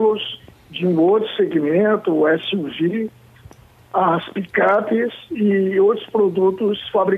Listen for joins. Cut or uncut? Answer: uncut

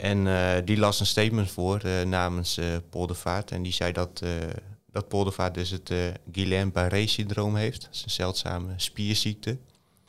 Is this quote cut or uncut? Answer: uncut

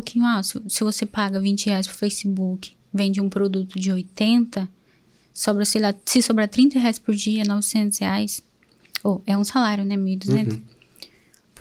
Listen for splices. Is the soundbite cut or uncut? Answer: uncut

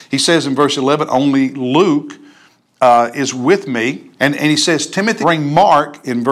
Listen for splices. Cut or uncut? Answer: cut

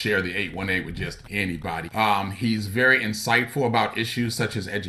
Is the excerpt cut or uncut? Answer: cut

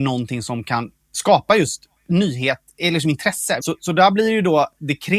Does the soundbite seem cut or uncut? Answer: cut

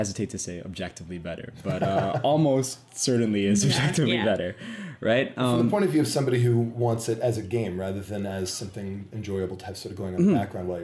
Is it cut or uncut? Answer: uncut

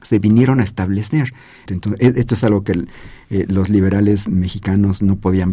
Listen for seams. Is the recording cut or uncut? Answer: cut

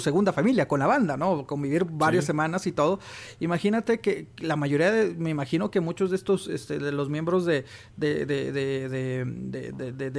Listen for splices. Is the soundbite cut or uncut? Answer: uncut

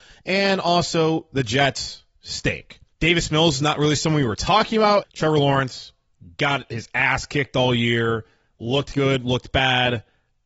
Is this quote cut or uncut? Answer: cut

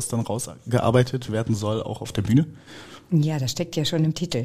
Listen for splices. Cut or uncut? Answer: uncut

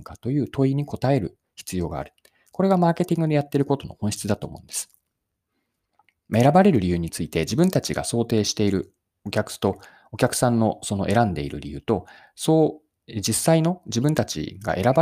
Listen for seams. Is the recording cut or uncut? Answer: uncut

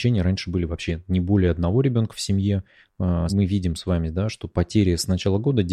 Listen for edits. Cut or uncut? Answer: cut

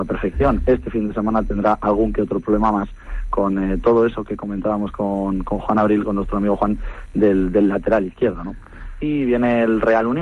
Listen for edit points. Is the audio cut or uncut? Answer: cut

